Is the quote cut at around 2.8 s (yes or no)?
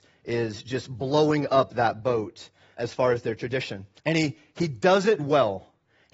yes